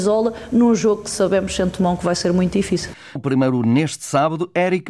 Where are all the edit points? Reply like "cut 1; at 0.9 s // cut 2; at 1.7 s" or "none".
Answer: cut 1; at 3.2 s